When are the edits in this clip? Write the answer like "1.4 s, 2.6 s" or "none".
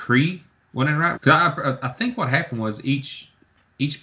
1.2 s